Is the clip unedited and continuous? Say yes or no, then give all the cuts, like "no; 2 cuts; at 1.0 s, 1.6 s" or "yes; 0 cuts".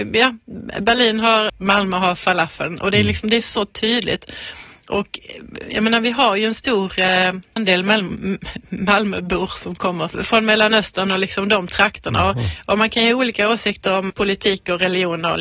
no; 1 cut; at 1.5 s